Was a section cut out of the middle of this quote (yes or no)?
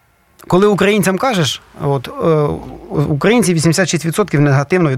no